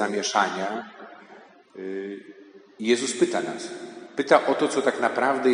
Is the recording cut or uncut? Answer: uncut